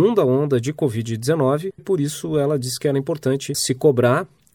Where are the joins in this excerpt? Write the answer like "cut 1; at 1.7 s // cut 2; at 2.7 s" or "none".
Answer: cut 1; at 1.8 s // cut 2; at 3.5 s